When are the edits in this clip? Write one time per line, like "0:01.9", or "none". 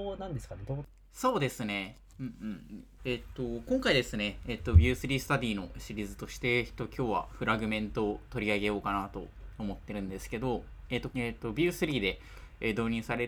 0:03.0
0:11.1